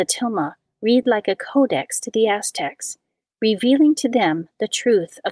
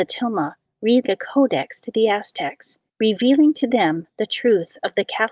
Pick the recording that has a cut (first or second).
second